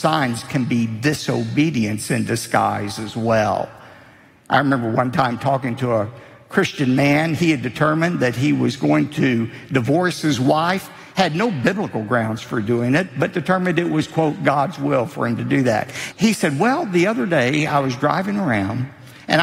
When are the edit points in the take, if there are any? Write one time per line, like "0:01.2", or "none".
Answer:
0:16.1